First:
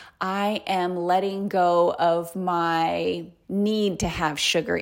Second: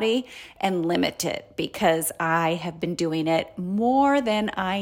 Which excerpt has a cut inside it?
first; 1 cut; at 3.4 s

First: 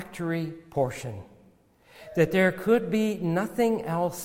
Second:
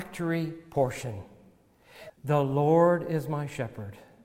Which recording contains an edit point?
second; 1 cut; at 2.1 s

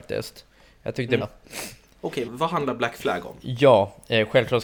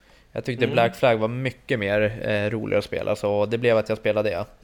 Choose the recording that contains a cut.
first; 2 cuts; at 1.2 s, 2.2 s

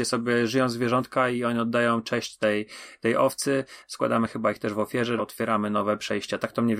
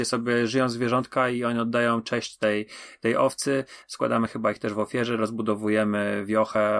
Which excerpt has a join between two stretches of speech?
first; 1 cut; at 5.2 s

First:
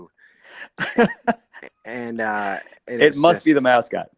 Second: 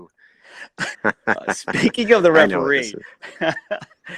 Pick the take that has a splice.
second; 1 cut; at 0.9 s

